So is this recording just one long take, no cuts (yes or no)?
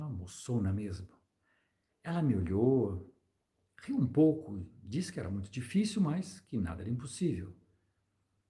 yes